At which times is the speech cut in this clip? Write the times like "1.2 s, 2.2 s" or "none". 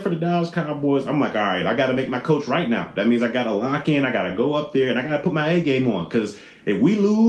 none